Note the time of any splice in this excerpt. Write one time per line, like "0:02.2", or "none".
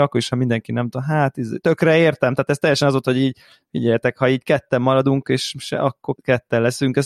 0:06.2